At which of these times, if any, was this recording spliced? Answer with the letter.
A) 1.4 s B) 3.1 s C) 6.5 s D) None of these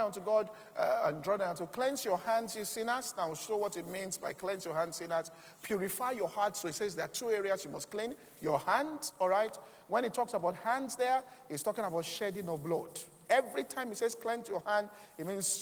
D